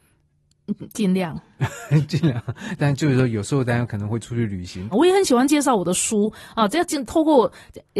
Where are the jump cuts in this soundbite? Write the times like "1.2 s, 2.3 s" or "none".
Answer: 4.9 s

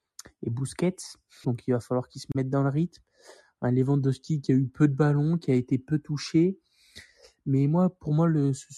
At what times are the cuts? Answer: 1.4 s

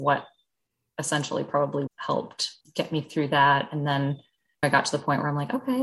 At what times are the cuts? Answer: 1.9 s

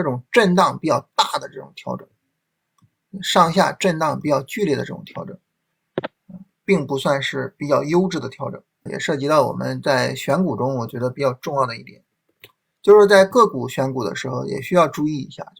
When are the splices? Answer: 8.9 s

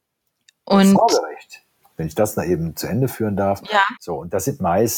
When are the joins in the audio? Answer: 4.0 s

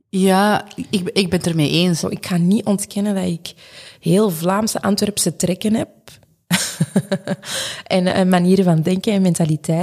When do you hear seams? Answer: 2.0 s

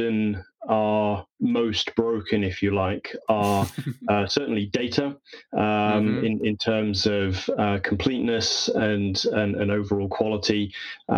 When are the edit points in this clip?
none

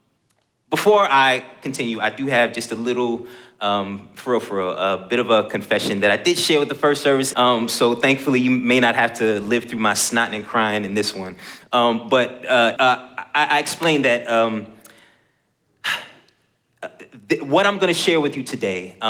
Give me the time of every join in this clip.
7.3 s, 12.8 s

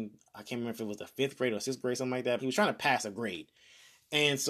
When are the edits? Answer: 2.4 s

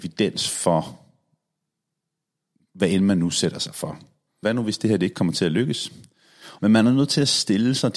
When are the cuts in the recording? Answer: 4.4 s, 6.6 s

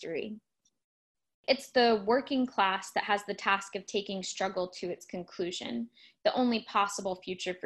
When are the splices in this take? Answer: 6.2 s

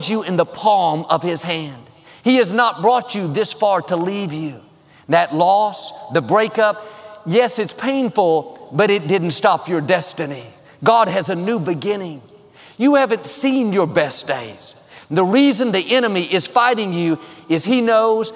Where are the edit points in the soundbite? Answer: 12.7 s

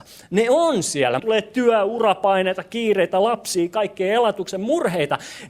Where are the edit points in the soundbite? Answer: 1.2 s

